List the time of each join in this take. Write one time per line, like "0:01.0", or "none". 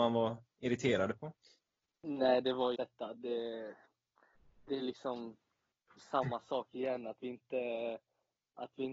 0:02.7